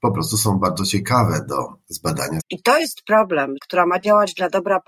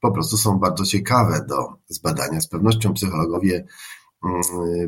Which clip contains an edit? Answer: first; 2 cuts; at 2.4 s, 3.6 s

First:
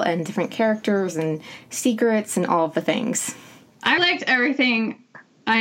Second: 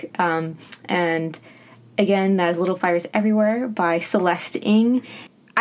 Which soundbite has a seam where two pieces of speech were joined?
first; 1 cut; at 4.0 s

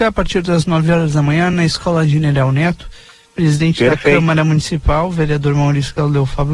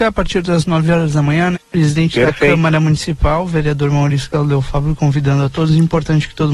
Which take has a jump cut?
second; 1 cut; at 1.5 s

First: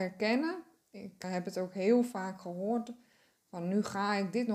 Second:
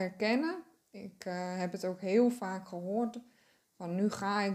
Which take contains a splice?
first; 1 cut; at 1.2 s

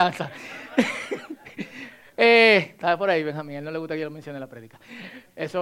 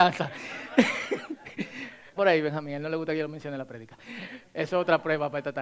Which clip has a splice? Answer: second; 1 cut; at 2.2 s

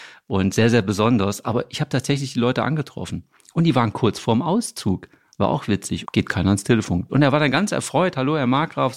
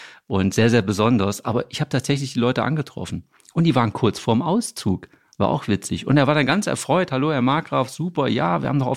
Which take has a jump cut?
first; 2 cuts; at 6.0 s, 7.1 s

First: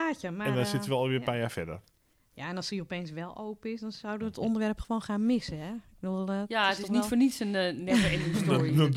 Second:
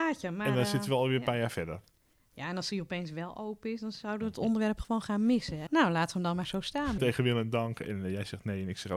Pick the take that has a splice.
second; 2 cuts; at 5.7 s, 7.0 s

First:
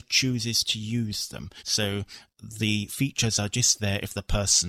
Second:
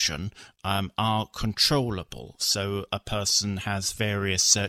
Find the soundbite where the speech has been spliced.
first; 1 cut; at 1.6 s

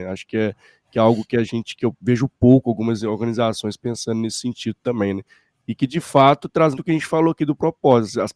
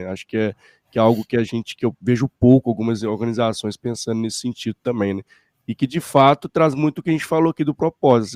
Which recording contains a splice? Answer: first; 1 cut; at 6.8 s

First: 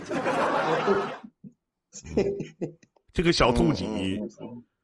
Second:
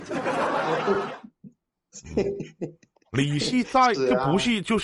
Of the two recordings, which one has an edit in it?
first; 1 cut; at 3.0 s

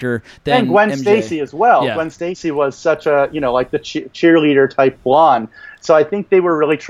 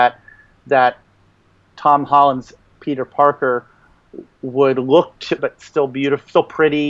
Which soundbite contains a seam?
second; 1 cut; at 5.4 s

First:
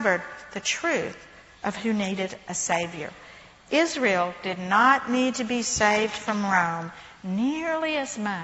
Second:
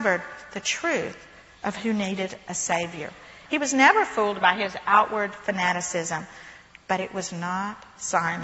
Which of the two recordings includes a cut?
second; 2 cuts; at 3.5 s, 6.7 s

